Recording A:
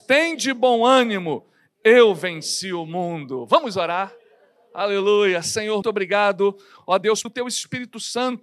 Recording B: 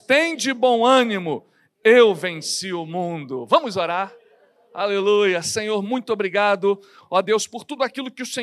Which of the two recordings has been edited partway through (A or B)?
A